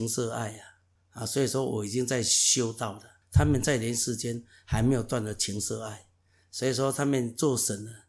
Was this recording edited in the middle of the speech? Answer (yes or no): no